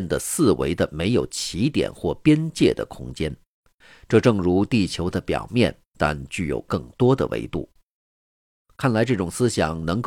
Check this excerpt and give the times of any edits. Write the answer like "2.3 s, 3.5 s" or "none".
none